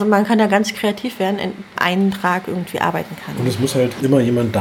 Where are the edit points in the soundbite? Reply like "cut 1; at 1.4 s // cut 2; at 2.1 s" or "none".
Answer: cut 1; at 1.7 s